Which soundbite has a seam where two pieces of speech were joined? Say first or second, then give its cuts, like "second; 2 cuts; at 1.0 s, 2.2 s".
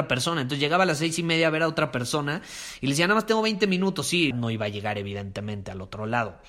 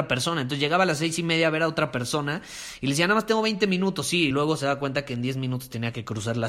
first; 1 cut; at 4.3 s